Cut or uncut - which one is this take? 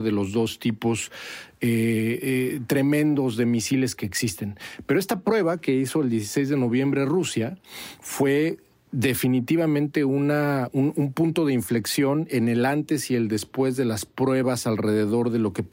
uncut